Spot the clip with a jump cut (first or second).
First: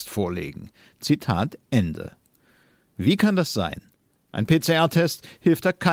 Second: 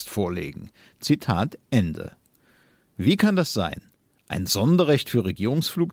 first